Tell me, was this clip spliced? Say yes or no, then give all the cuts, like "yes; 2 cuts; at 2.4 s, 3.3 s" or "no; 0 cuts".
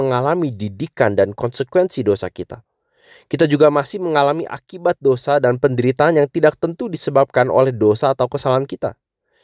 no; 0 cuts